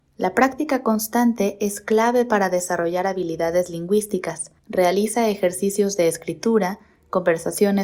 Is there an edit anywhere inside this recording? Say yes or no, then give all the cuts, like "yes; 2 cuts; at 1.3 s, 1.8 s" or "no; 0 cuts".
yes; 1 cut; at 4.6 s